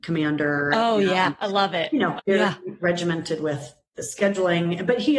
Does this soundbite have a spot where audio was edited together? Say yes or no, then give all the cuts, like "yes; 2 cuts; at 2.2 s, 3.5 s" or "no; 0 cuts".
yes; 1 cut; at 2.2 s